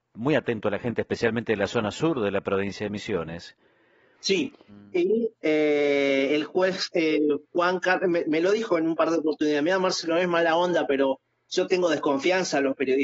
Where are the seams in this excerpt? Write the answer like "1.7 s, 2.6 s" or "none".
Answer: 4.7 s